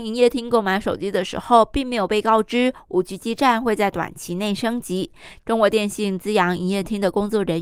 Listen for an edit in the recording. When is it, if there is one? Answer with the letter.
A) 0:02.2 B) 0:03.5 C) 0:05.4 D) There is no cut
C